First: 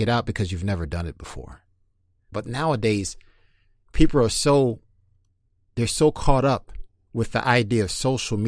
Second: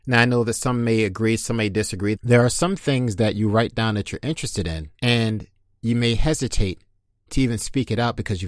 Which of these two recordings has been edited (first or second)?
second